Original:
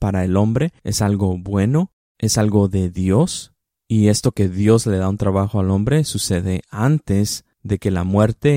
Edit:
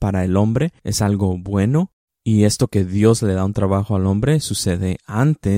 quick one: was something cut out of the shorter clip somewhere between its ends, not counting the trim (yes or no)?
yes